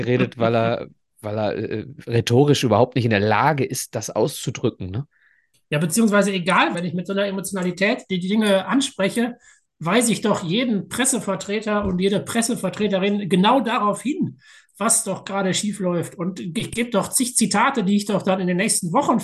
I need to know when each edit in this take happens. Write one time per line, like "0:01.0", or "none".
0:06.7